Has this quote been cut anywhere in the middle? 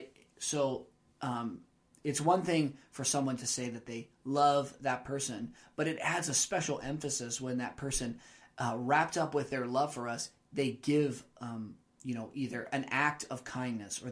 no; 0 cuts

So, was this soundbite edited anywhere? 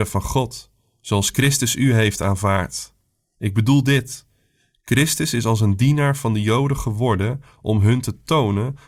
no; 0 cuts

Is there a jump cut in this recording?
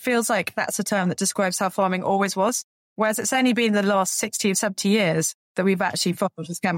no; 0 cuts

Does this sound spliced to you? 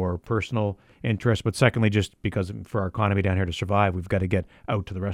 no; 0 cuts

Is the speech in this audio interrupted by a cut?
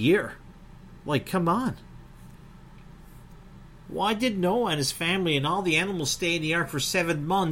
yes; 1 cut; at 1.0 s

